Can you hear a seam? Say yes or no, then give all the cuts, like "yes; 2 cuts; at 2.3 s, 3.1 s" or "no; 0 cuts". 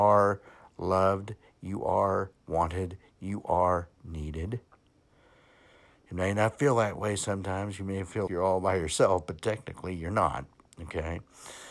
yes; 1 cut; at 8.3 s